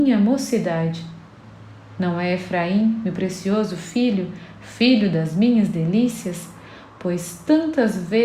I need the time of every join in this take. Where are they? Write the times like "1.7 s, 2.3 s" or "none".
none